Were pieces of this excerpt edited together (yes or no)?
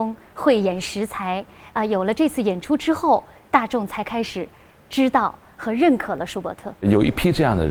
no